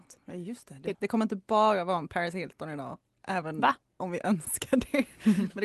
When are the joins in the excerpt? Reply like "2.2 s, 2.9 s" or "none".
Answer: 0.9 s